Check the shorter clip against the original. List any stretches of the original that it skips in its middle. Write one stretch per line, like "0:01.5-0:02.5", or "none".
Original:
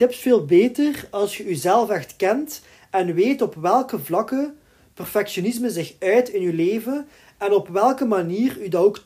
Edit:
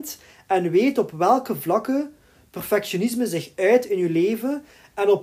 none